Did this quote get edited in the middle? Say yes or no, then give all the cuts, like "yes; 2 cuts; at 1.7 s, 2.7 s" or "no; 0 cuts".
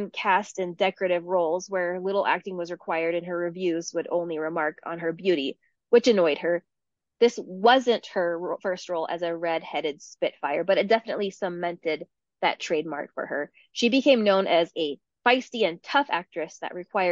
no; 0 cuts